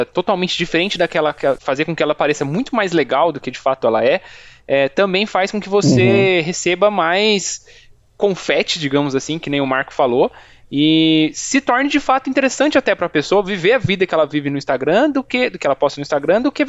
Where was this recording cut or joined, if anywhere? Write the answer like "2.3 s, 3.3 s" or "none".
1.6 s